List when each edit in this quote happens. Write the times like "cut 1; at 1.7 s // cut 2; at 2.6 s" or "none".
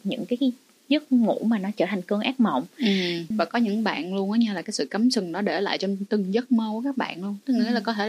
cut 1; at 3.3 s